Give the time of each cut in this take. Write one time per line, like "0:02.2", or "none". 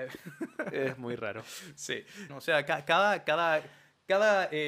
0:02.3